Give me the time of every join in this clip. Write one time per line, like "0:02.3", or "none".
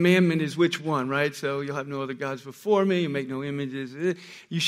none